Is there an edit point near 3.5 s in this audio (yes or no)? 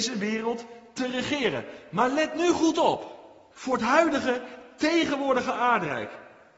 yes